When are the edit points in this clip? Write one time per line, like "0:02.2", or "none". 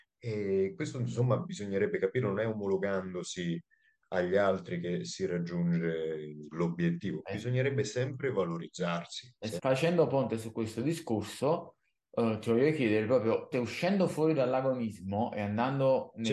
0:09.6
0:13.5